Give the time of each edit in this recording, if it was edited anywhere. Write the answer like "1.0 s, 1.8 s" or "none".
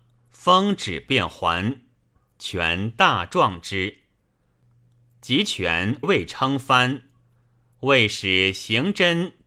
6.0 s